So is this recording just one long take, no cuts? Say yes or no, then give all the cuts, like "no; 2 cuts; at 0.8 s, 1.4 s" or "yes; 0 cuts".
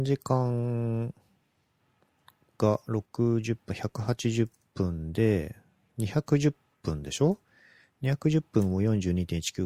no; 1 cut; at 3.1 s